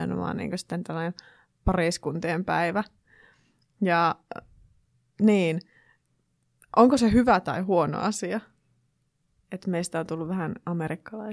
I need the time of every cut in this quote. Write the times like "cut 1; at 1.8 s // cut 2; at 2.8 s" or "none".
none